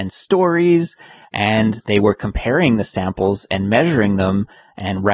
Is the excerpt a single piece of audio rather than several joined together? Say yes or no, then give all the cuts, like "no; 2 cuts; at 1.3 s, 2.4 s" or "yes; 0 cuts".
no; 1 cut; at 1.2 s